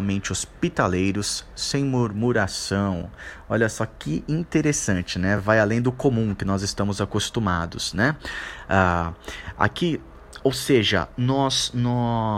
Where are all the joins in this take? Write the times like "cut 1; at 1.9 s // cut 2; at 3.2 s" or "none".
none

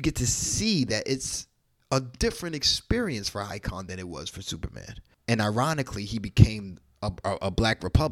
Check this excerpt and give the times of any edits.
cut 1; at 5.2 s

